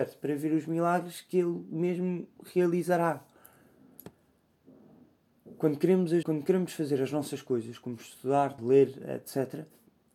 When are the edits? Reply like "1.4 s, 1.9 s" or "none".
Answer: 6.2 s, 8.6 s